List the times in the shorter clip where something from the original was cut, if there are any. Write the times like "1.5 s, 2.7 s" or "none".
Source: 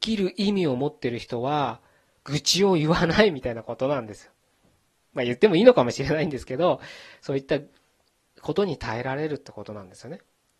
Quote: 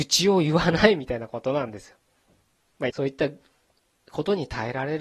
2.9 s